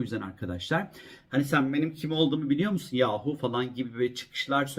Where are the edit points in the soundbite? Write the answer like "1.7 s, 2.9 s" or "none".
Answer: 1.3 s